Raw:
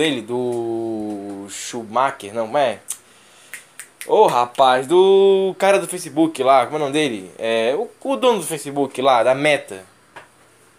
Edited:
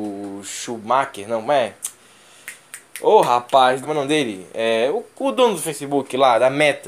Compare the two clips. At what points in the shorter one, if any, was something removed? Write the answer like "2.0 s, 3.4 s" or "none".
3.8 s